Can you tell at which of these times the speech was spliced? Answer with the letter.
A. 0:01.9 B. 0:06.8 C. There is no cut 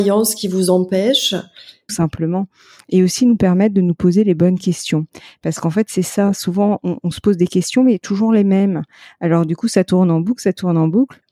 A